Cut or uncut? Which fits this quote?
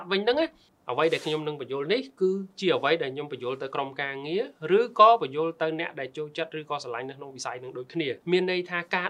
cut